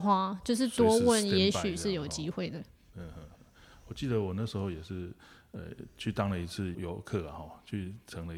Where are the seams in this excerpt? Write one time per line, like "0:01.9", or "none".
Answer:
0:06.7